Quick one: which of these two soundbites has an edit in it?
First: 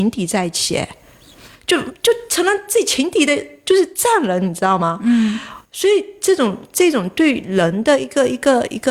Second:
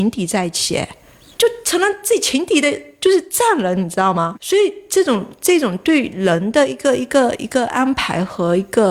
second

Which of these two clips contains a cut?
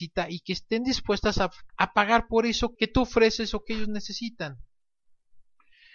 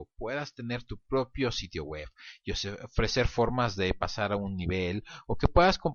first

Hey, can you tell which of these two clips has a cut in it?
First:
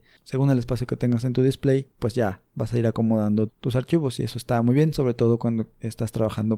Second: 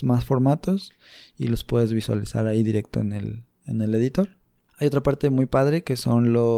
first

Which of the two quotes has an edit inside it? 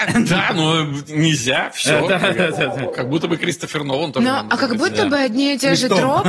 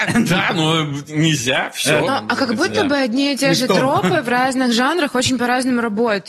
second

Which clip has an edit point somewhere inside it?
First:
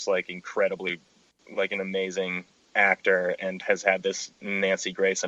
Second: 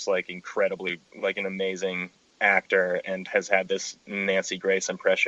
second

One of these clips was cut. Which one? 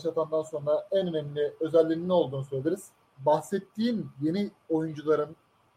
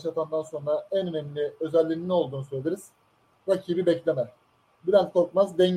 first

